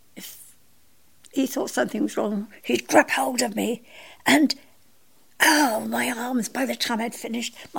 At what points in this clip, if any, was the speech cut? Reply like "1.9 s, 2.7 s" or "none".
none